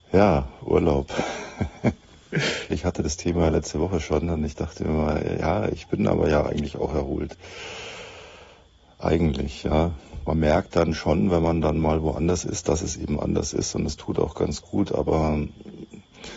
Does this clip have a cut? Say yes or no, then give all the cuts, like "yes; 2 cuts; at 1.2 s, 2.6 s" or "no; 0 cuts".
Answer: yes; 1 cut; at 2.7 s